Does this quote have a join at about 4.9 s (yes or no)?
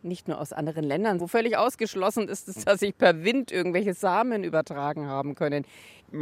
no